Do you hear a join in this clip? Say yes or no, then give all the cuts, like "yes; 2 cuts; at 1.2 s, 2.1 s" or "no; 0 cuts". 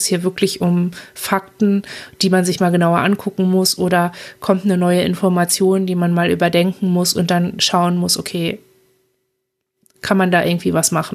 no; 0 cuts